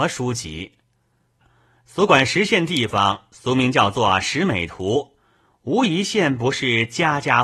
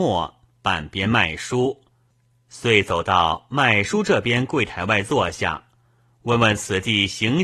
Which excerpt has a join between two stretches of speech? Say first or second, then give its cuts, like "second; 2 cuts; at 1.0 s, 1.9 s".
first; 1 cut; at 1.4 s